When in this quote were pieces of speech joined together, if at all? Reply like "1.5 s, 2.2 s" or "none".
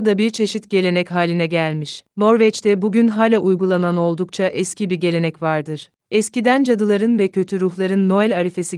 none